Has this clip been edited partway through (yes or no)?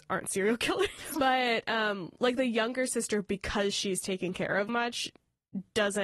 yes